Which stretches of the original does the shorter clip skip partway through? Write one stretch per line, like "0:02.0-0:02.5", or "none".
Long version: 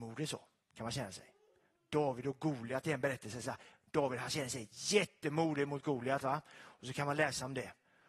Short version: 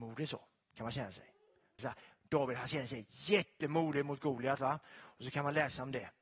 0:01.8-0:03.4